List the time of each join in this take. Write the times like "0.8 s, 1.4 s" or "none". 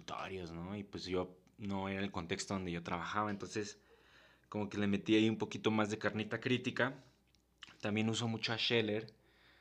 none